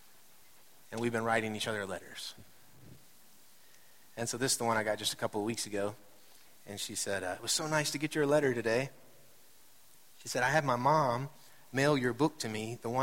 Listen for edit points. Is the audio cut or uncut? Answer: uncut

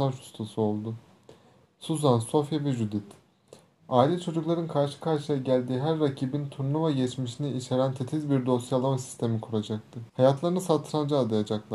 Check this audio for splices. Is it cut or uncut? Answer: cut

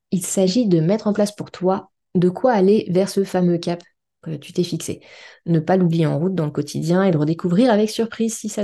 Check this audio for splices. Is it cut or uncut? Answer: uncut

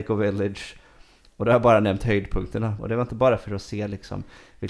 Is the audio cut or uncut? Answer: cut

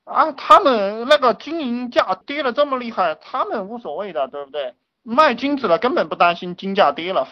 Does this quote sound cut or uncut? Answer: uncut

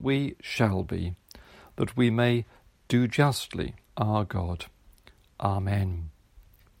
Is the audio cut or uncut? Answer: cut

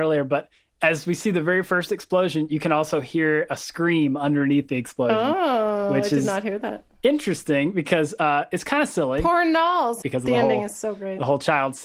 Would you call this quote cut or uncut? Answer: cut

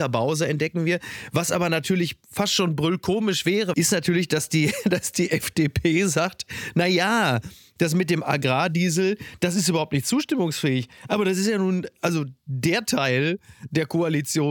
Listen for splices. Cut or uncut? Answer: cut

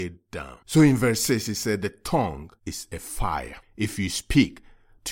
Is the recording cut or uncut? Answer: cut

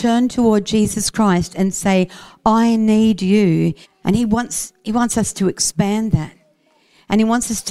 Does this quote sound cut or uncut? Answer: cut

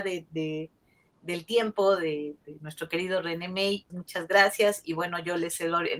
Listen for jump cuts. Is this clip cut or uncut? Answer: cut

